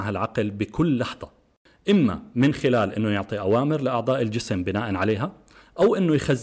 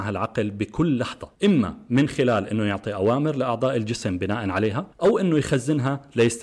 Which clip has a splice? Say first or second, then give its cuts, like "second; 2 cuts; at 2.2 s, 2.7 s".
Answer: second; 2 cuts; at 1.4 s, 4.9 s